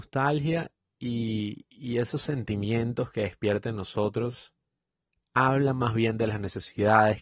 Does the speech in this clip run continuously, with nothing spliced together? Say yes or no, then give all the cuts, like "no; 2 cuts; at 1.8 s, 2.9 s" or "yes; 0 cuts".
yes; 0 cuts